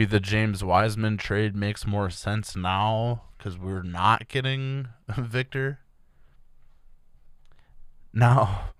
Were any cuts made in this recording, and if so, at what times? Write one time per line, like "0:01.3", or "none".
none